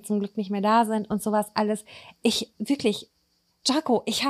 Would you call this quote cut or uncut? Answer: cut